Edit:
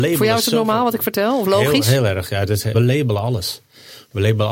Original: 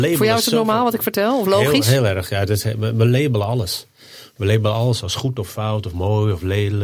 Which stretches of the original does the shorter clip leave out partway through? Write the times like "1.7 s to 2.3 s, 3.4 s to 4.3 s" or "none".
2.7 s to 3.0 s